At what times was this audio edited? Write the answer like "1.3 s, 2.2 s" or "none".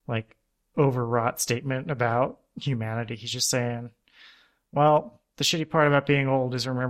none